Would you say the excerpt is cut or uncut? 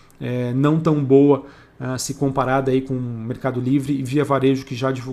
uncut